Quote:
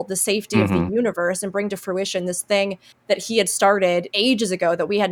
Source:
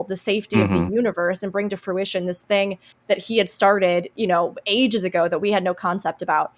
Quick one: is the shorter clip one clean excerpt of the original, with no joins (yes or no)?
no